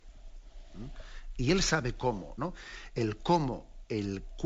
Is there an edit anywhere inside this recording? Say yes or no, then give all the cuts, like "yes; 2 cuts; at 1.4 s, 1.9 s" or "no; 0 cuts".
yes; 1 cut; at 2.4 s